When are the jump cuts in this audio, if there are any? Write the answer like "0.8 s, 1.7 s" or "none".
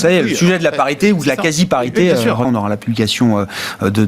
2.4 s